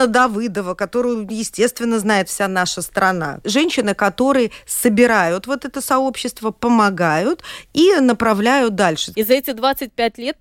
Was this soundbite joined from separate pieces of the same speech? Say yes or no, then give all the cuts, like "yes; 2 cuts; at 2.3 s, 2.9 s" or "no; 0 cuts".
yes; 2 cuts; at 3.4 s, 9.1 s